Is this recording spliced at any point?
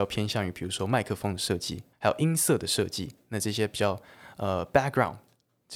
yes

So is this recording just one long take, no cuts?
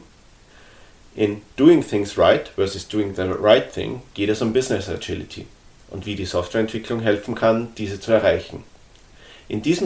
yes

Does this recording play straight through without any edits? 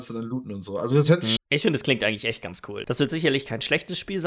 no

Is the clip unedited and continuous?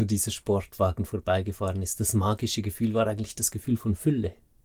yes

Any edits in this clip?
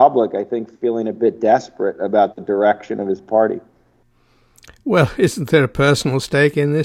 no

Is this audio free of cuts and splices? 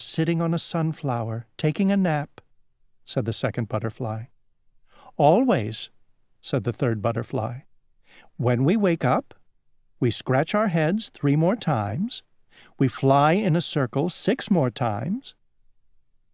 yes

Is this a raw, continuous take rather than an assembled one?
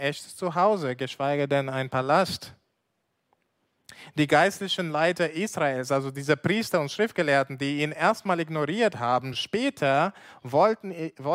yes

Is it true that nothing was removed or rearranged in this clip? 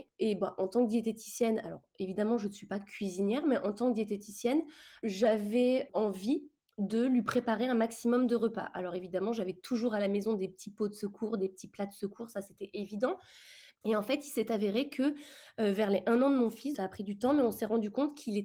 no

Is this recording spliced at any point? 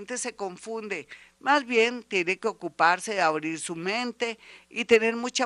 yes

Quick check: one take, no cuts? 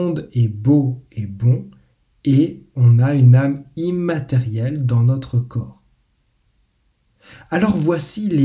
yes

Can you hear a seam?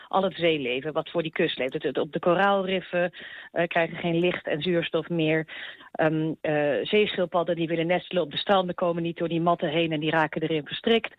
no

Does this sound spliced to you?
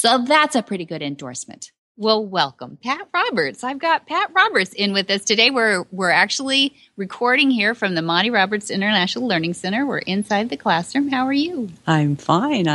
no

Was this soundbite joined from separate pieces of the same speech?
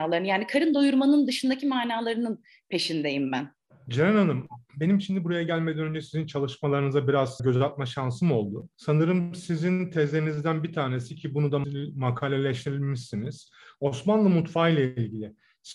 no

